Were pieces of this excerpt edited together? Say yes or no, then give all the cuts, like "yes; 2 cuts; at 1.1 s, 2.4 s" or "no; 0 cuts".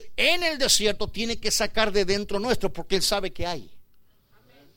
no; 0 cuts